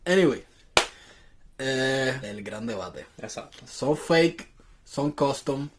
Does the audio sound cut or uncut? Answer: cut